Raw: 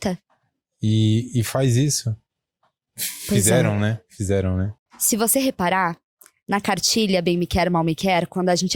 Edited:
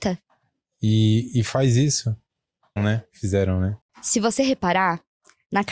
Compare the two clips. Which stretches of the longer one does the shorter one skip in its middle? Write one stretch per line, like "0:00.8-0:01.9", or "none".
0:02.8-0:03.7